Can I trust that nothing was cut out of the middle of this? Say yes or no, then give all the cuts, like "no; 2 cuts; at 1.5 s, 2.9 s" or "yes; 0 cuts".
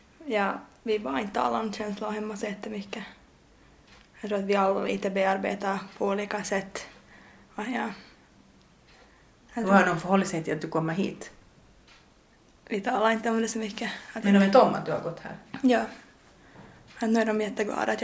yes; 0 cuts